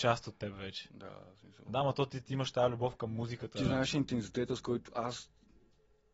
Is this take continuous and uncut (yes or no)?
yes